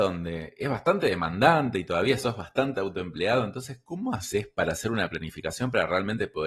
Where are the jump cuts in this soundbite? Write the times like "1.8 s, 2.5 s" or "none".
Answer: none